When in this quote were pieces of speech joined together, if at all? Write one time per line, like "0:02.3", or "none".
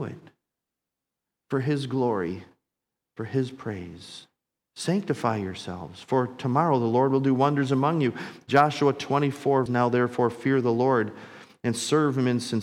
0:04.7
0:09.7